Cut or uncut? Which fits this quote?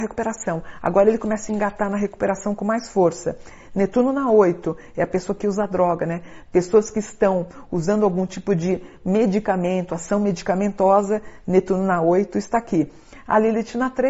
uncut